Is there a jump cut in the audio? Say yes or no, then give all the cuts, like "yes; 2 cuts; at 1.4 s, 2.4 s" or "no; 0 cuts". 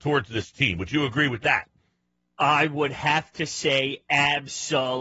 no; 0 cuts